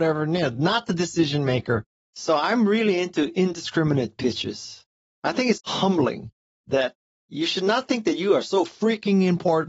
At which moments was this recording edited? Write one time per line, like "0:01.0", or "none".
0:02.0
0:05.6